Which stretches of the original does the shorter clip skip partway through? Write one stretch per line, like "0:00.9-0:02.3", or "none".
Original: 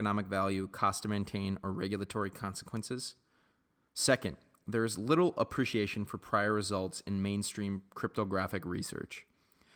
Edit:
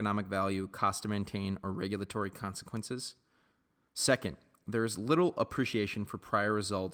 none

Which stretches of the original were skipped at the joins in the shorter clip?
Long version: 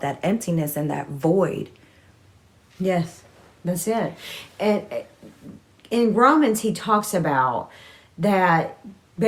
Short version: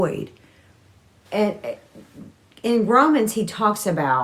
0:02.6-0:04.5

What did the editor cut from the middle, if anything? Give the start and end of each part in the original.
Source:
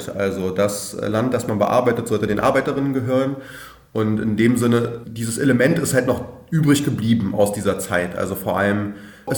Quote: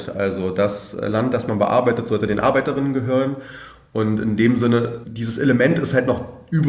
none

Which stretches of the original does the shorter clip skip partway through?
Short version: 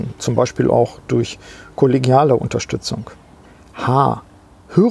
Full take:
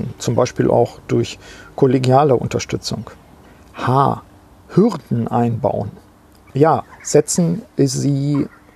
none

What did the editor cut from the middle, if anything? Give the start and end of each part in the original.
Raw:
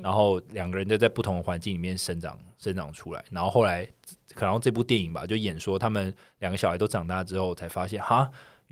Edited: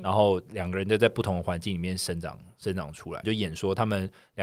0:03.2-0:05.3

